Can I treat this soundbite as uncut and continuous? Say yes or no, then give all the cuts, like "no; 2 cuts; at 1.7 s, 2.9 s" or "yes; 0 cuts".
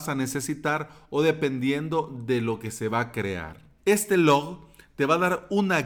no; 1 cut; at 3.8 s